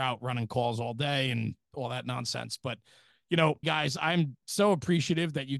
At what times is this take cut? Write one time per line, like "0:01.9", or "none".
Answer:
0:03.6